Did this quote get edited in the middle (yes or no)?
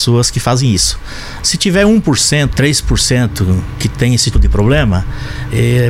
yes